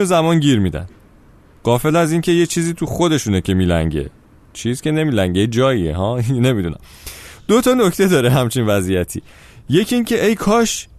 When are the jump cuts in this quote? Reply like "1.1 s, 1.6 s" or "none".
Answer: none

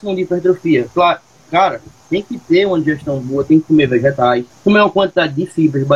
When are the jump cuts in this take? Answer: 4.5 s

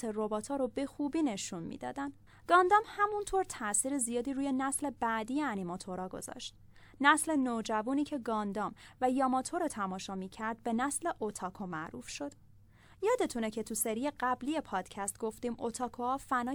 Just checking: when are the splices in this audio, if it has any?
none

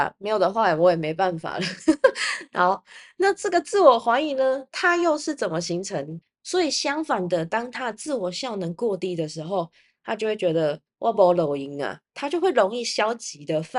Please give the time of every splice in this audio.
6.2 s, 12.1 s

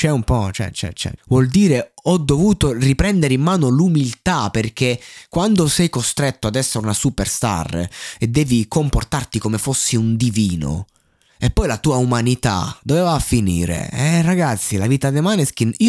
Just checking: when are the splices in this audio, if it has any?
1.2 s

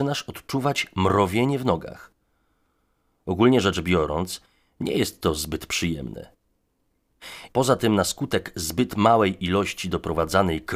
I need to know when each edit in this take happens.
7.5 s

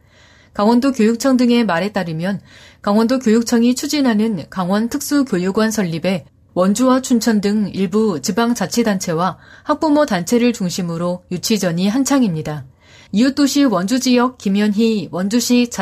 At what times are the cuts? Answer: 13.1 s

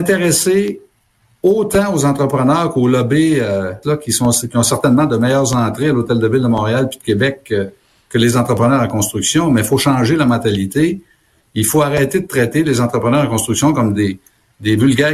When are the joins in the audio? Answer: 3.8 s

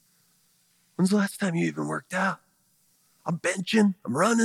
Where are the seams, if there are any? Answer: none

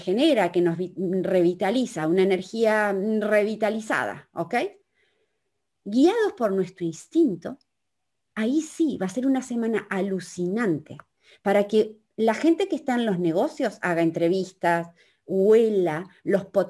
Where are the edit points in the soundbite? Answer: none

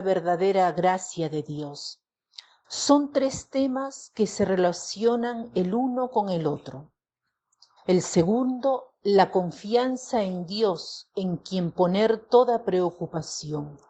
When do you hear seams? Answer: 2.6 s, 7.8 s

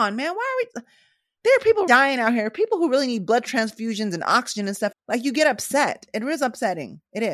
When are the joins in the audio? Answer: 1.9 s, 4.9 s

